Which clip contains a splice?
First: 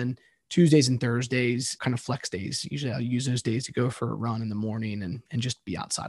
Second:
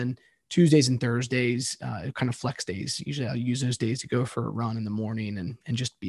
first; 1 cut; at 1.8 s

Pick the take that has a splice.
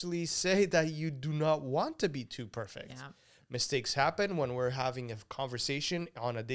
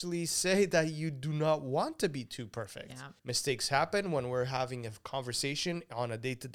second; 1 cut; at 3.2 s

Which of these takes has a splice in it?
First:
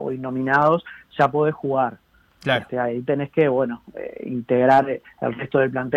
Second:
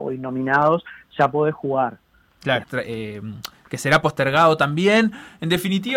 second; 1 cut; at 2.6 s

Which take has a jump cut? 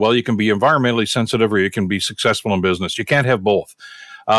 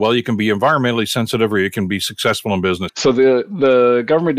second; 1 cut; at 2.9 s

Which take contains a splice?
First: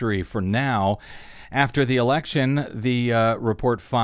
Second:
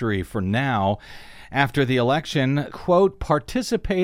second; 1 cut; at 2.7 s

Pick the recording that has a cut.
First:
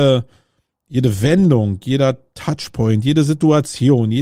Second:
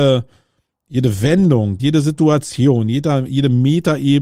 second; 1 cut; at 1.8 s

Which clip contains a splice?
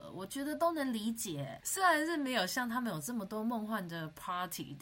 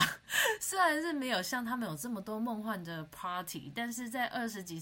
first; 1 cut; at 1.6 s

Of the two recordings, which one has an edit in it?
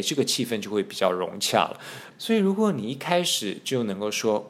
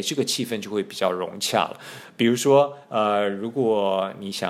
first; 1 cut; at 2.1 s

